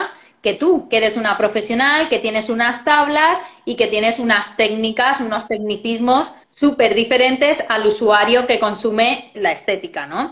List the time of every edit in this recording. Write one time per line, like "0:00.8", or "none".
0:06.4
0:09.3